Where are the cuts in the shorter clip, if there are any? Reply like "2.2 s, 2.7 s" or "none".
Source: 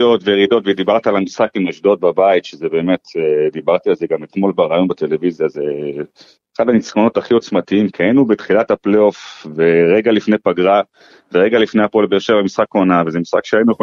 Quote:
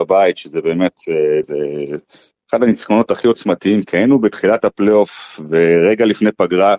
1.4 s